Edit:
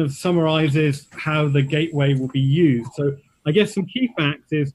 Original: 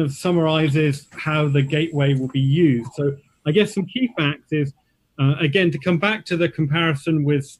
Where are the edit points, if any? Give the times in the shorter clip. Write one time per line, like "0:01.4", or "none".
none